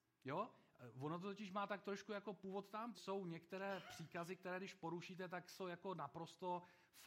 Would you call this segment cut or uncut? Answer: cut